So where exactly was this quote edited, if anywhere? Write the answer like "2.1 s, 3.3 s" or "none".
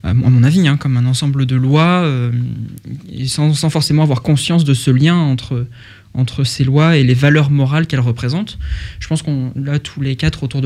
none